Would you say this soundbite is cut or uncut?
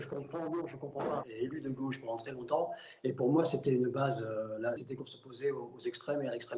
cut